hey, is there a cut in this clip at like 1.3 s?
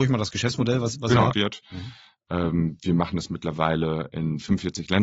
yes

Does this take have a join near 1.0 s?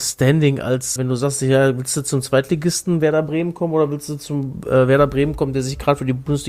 yes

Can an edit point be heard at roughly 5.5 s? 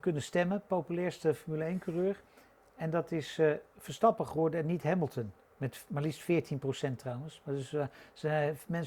no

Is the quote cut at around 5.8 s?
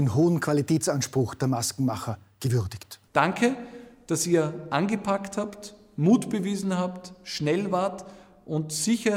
no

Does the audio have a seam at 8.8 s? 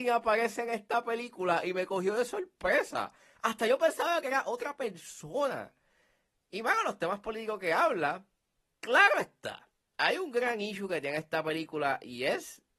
yes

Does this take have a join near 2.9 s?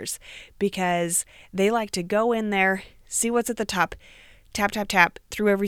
no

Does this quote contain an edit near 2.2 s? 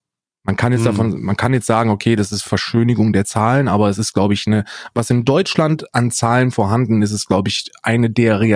no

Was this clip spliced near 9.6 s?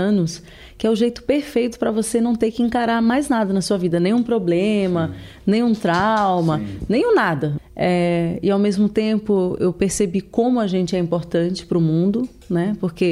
yes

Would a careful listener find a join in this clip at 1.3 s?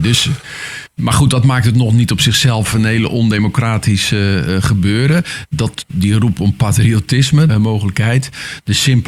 no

